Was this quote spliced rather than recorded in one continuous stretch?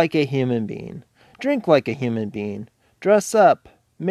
no; 0 cuts

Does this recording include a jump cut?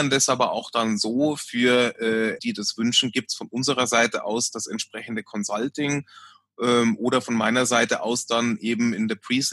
yes; 1 cut; at 2.4 s

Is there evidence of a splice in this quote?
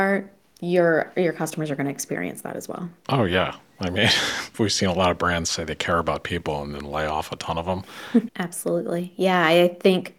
yes; 2 cuts; at 4.5 s, 8.3 s

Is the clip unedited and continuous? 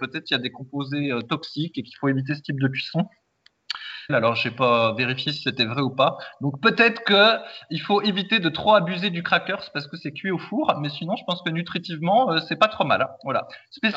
no; 1 cut; at 4.1 s

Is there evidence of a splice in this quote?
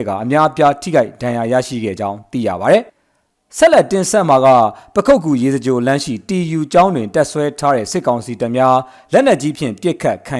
yes; 1 cut; at 2.9 s

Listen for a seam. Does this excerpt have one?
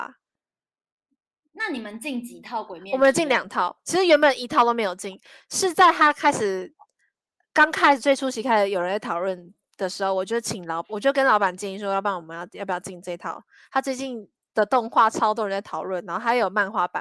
no; 0 cuts

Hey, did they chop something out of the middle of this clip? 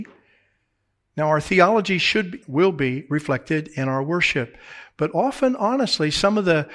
yes; 1 cut; at 2.4 s

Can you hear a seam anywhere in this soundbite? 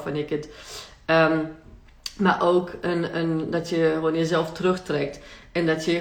no; 0 cuts

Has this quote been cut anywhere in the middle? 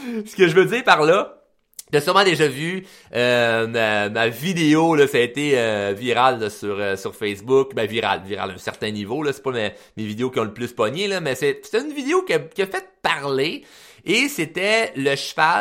no; 0 cuts

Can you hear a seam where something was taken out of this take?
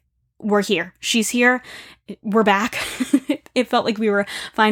no; 0 cuts

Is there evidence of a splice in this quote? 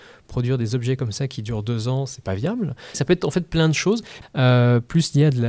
yes; 2 cuts; at 2.9 s, 4.2 s

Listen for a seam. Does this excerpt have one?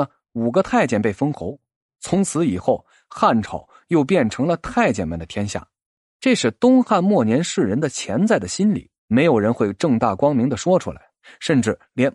yes; 2 cuts; at 6.0 s, 9.0 s

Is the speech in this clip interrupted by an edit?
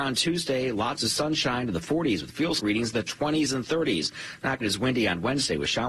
yes; 2 cuts; at 2.6 s, 4.6 s

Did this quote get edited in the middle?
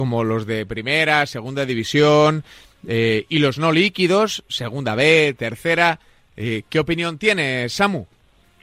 no; 0 cuts

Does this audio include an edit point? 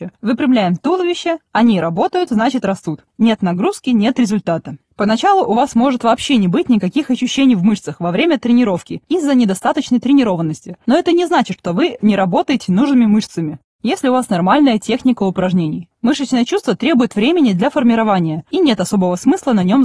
yes; 1 cut; at 3.1 s

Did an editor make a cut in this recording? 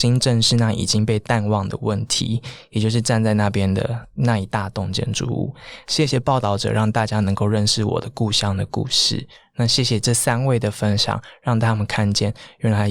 no; 0 cuts

